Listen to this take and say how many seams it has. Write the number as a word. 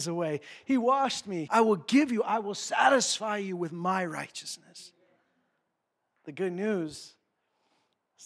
one